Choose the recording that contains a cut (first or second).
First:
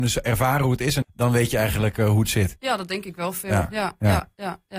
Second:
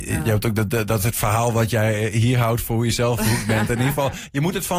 first